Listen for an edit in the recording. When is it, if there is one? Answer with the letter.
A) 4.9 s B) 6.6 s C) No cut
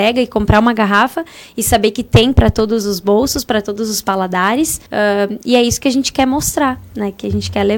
A